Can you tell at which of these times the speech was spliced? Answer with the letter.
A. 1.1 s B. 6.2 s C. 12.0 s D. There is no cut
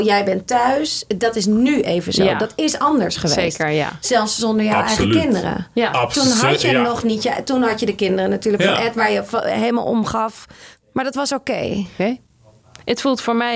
C